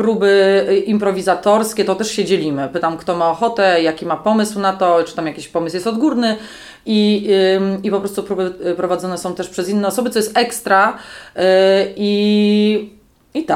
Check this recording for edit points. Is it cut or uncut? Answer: uncut